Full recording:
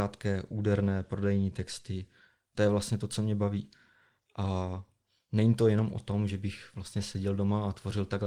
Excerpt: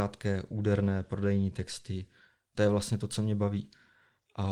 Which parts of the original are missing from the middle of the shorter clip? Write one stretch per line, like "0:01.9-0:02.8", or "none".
none